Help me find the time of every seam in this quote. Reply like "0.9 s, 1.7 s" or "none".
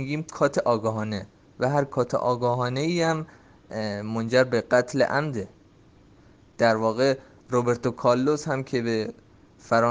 none